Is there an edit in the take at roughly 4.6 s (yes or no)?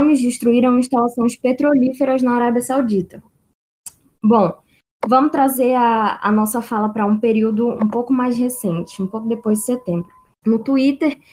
no